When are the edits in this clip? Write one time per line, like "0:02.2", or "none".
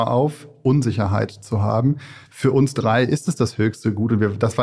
none